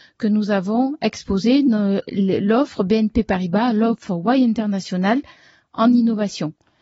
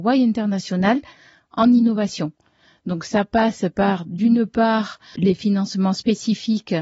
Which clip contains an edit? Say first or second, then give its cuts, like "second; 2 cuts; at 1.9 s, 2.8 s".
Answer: second; 1 cut; at 5.2 s